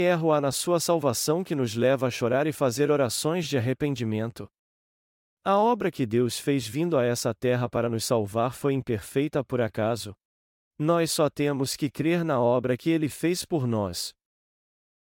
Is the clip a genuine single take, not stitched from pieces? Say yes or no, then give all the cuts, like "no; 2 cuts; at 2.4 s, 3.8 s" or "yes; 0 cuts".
no; 1 cut; at 10.7 s